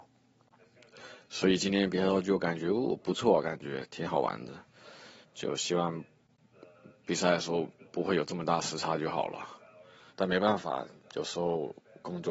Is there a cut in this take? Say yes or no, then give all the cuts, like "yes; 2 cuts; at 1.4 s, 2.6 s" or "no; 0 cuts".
yes; 2 cuts; at 5.2 s, 10.1 s